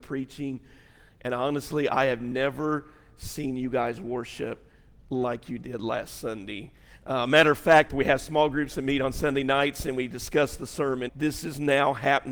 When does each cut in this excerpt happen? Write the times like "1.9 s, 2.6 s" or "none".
7.9 s, 11.1 s

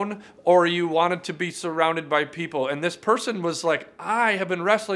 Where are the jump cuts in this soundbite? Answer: none

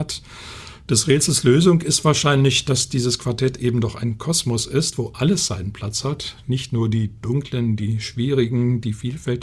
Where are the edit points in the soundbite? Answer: none

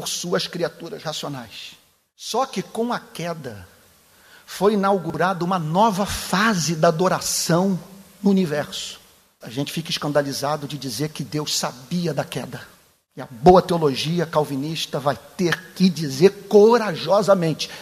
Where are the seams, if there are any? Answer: 9.4 s

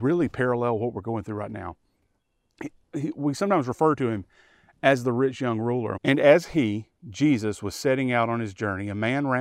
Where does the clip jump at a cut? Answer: 6.0 s

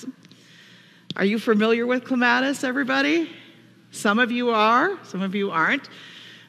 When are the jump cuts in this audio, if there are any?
none

